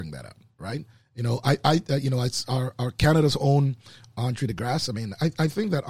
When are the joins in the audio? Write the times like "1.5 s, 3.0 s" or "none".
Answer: none

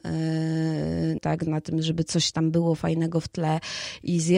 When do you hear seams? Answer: 1.2 s

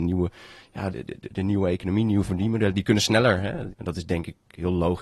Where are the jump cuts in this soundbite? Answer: 0.9 s, 3.7 s

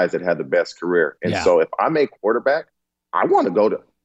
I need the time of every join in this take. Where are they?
none

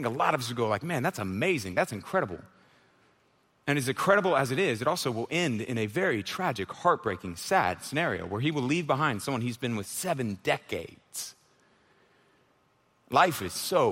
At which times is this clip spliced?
none

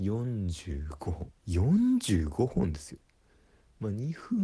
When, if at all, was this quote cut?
1.4 s

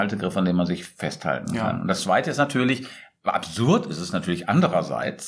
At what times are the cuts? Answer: none

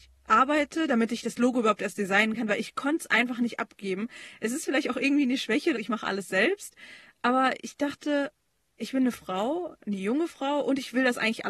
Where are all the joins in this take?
5.7 s

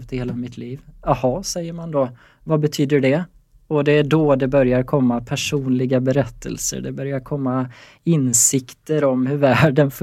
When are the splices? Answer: none

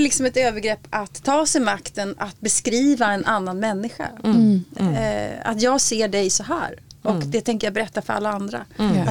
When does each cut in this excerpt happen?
none

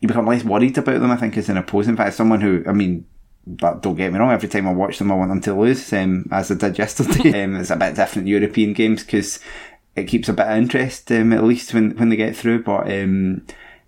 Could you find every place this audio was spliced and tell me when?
7.3 s

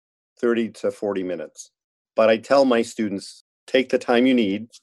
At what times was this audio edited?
none

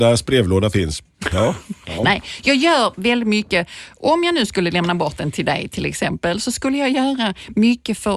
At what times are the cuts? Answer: 1.3 s

